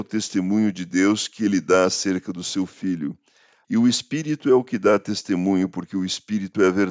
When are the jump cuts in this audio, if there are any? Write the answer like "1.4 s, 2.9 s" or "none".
3.6 s